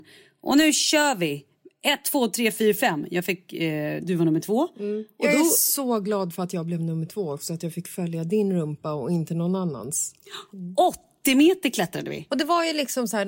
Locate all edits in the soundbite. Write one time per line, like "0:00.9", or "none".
0:04.0
0:10.5
0:12.3